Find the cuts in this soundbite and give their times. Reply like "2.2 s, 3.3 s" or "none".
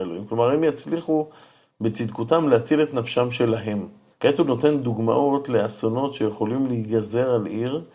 4.1 s